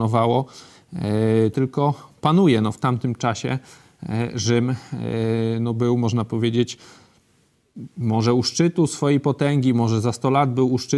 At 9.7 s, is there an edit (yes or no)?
no